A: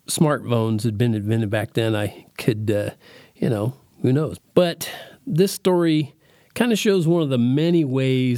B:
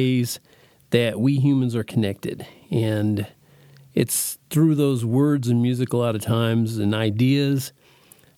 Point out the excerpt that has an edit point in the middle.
A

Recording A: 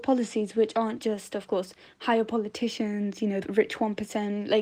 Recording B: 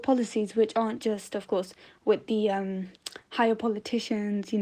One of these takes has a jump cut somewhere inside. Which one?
A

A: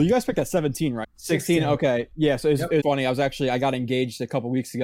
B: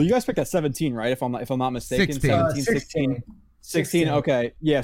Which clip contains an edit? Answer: A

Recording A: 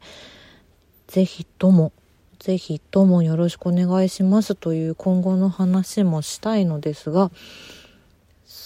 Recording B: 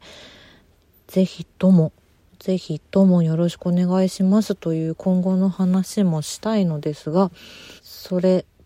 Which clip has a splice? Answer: B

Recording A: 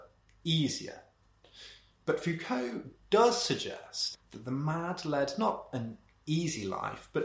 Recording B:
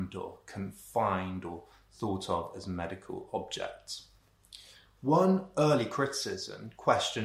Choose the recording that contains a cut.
A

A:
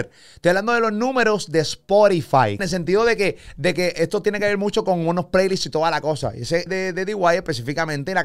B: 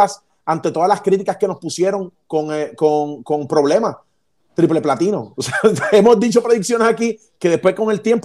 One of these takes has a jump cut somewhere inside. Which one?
A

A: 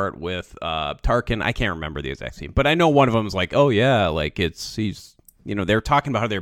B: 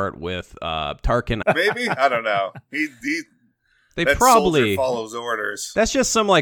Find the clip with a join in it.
B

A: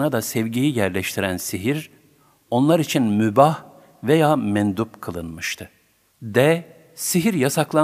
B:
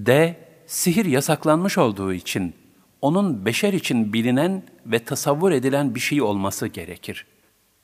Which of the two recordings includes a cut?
A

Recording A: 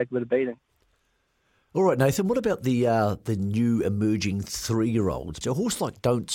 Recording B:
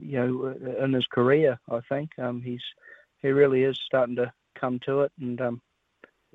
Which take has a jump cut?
A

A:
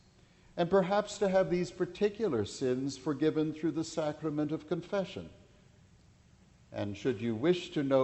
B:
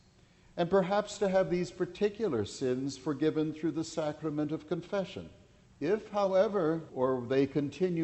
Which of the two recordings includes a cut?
B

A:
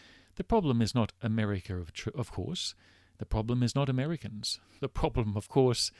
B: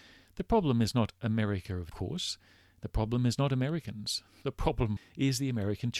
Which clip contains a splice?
B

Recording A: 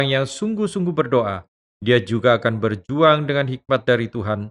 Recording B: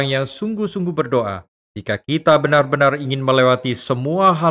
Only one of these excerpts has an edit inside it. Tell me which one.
B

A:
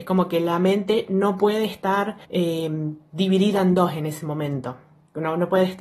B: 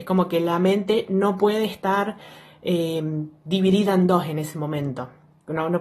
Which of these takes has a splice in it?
A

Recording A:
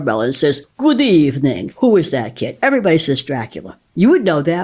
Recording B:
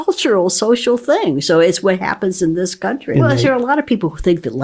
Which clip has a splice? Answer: B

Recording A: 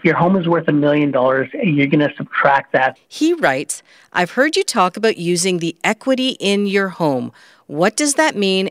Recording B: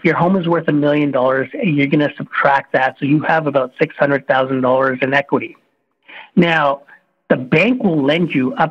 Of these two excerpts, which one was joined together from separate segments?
A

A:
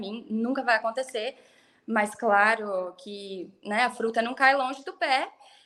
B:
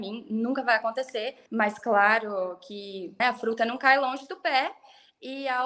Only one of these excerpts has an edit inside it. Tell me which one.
B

